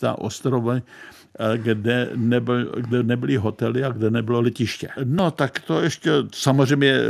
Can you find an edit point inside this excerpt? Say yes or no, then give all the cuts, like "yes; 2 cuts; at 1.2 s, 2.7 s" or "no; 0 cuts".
yes; 1 cut; at 5.0 s